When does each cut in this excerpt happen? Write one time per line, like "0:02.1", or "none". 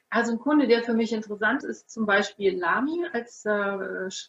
0:01.6